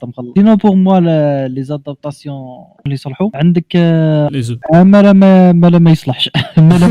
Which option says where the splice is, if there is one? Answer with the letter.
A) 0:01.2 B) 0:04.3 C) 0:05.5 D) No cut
B